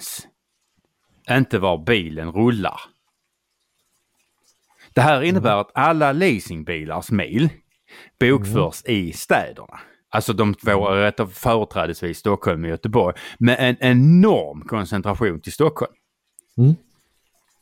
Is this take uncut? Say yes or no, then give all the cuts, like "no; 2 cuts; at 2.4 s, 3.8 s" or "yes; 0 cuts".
yes; 0 cuts